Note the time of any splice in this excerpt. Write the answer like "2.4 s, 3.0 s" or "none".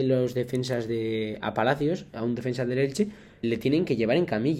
3.4 s